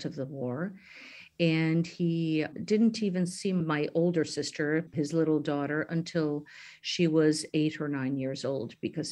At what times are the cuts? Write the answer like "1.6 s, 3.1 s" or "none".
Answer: none

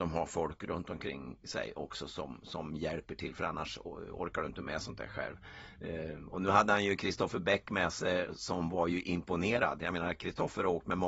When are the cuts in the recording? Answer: none

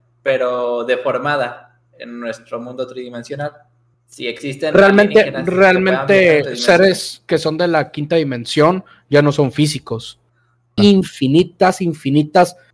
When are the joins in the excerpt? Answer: 3.9 s, 10.8 s

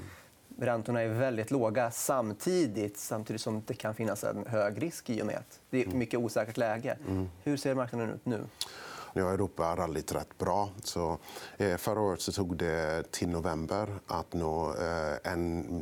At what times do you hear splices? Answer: 9.1 s, 10.8 s

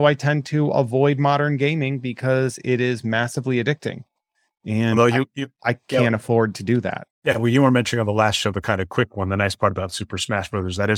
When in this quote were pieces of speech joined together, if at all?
none

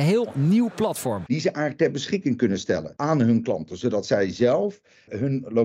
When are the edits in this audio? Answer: none

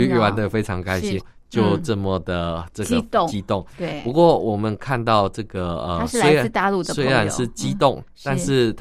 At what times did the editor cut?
1.2 s

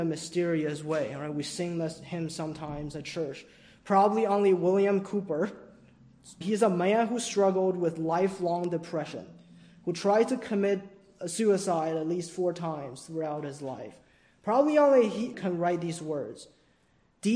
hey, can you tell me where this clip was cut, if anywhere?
6.4 s, 15.3 s

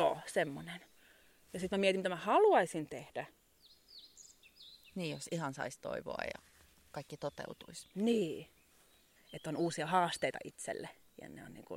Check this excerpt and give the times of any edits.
9.2 s

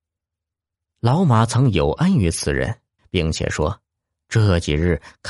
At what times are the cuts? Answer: 3.0 s

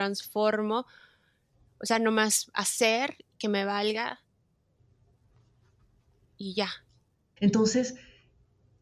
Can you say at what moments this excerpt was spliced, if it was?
7.4 s

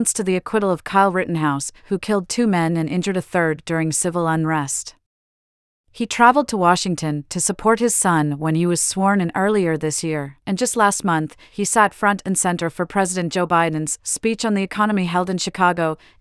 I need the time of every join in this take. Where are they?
5.8 s, 10.4 s

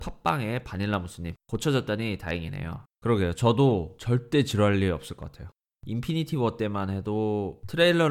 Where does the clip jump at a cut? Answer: 2.9 s, 5.8 s

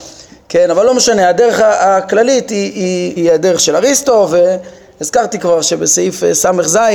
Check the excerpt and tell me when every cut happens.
3.2 s

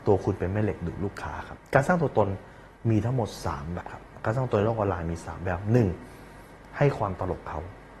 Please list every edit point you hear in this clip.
3.8 s

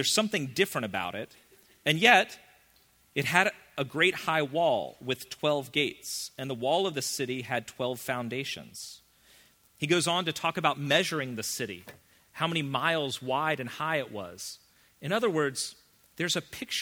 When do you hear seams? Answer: 14.9 s

